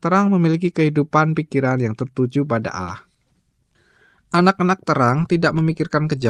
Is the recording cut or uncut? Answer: uncut